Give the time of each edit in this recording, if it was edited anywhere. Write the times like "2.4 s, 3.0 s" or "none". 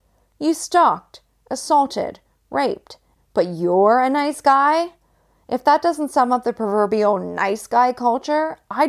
3.2 s